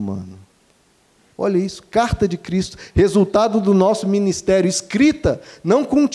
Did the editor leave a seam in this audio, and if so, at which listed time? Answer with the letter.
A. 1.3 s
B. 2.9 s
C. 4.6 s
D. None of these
A